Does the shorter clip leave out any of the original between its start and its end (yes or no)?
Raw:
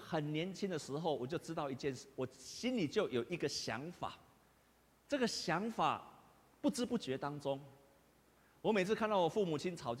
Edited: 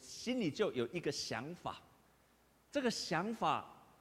no